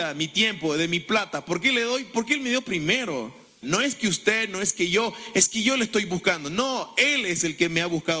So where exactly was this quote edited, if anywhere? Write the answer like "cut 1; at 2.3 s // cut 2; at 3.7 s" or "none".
cut 1; at 3.6 s